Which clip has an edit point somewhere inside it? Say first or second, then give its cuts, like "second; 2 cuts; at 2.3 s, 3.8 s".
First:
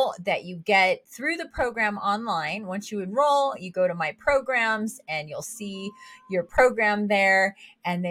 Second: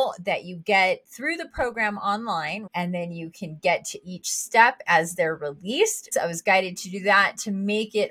second; 2 cuts; at 2.7 s, 6.1 s